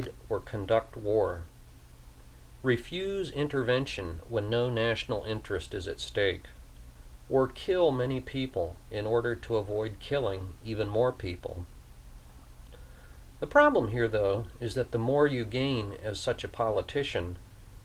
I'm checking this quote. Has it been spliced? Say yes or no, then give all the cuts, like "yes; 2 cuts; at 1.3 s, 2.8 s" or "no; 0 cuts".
no; 0 cuts